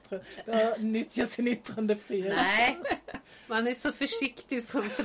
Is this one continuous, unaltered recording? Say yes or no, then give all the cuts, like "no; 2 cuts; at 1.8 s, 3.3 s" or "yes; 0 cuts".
yes; 0 cuts